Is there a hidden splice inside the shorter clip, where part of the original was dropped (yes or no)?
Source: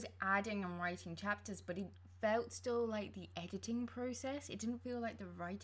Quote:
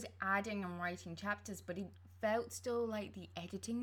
no